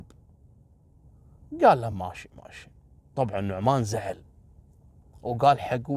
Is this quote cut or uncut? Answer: uncut